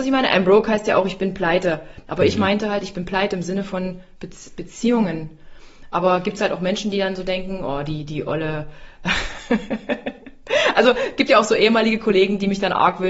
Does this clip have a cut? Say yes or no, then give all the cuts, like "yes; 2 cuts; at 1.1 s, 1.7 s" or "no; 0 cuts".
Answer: no; 0 cuts